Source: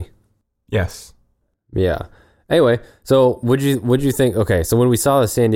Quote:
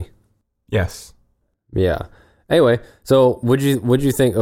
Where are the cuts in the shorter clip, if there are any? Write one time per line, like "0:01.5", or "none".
none